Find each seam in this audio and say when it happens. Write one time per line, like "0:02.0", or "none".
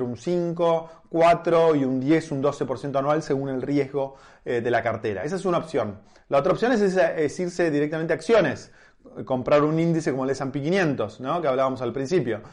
none